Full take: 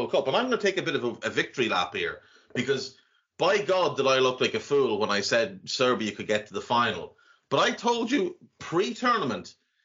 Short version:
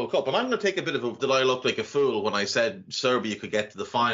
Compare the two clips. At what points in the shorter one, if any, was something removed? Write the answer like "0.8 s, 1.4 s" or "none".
1.2 s